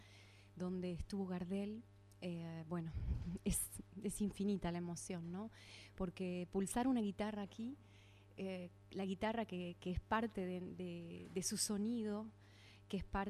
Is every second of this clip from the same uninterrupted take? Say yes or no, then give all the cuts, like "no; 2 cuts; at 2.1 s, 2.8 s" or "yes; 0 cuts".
yes; 0 cuts